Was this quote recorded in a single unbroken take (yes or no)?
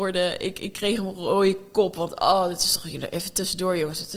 yes